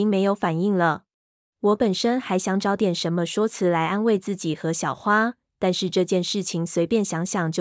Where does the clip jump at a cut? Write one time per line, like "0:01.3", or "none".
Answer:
0:01.5